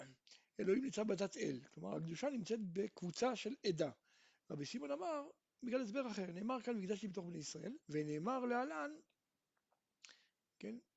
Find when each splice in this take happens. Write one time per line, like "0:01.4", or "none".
0:04.3
0:07.8